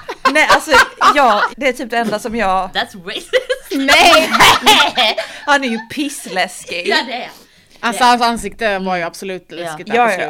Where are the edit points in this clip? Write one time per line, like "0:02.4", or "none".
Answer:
0:01.5